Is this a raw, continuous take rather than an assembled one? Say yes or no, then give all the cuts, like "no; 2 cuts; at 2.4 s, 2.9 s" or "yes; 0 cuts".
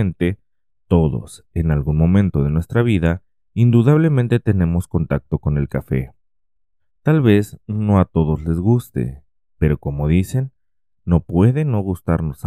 yes; 0 cuts